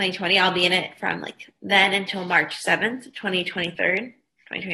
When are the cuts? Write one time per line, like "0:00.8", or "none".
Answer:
none